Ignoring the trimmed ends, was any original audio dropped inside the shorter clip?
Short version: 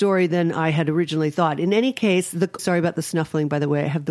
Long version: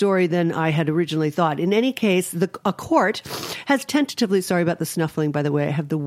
yes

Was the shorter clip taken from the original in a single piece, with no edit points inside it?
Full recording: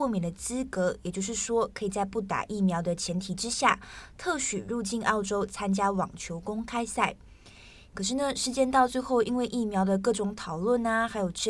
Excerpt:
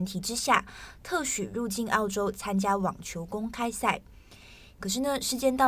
yes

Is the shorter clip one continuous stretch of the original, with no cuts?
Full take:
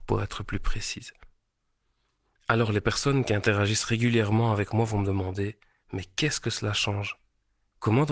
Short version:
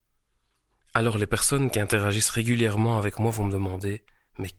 yes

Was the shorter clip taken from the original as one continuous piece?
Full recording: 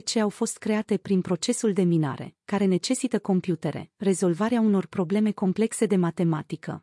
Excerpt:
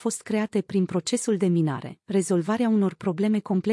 no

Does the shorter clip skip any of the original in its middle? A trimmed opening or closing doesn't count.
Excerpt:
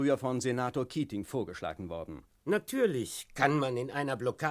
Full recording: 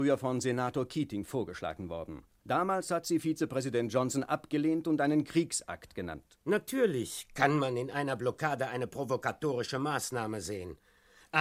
yes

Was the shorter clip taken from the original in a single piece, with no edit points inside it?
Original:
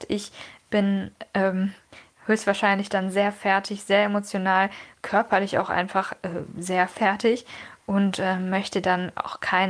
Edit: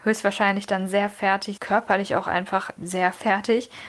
no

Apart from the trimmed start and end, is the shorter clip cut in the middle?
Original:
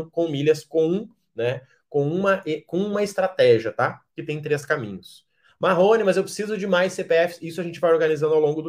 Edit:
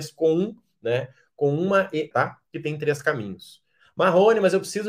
yes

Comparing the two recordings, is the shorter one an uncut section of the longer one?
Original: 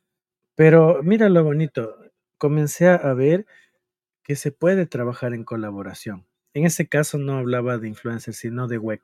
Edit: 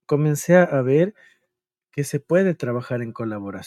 yes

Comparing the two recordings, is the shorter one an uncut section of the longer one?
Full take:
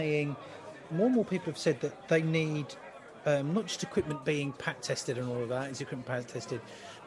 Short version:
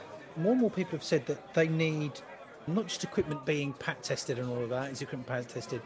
no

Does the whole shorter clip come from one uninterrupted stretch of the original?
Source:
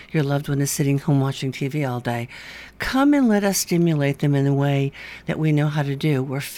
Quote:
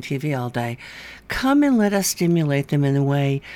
yes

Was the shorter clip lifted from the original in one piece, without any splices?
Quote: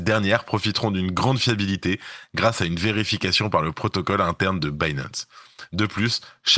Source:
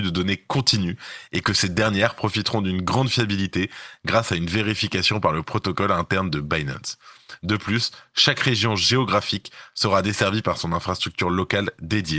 yes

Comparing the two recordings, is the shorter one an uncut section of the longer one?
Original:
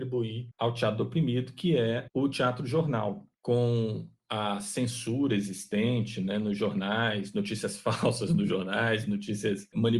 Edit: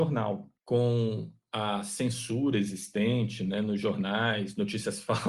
yes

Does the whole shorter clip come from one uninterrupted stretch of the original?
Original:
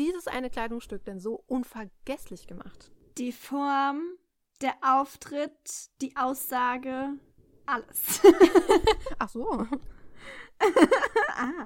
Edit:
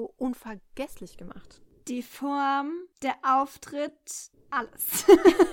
no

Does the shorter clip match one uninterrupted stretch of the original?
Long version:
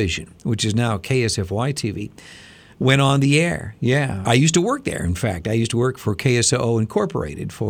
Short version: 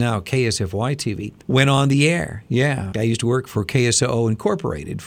no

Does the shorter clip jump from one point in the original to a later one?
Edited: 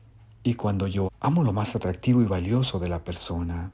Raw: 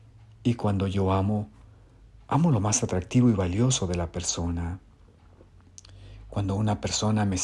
yes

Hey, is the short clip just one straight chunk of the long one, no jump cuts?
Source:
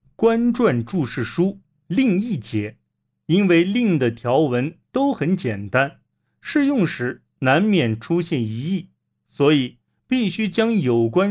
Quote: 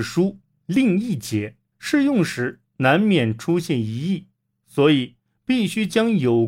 no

